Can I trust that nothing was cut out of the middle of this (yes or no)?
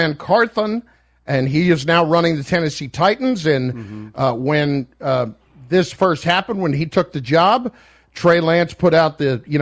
yes